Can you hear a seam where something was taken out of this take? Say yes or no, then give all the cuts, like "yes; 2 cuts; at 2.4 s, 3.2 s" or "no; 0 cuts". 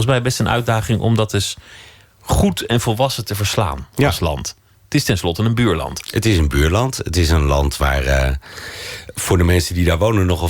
no; 0 cuts